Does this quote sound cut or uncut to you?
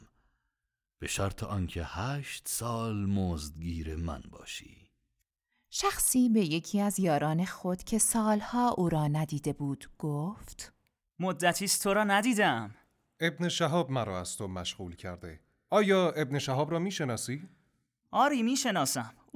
uncut